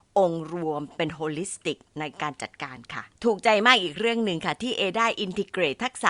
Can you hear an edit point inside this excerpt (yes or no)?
yes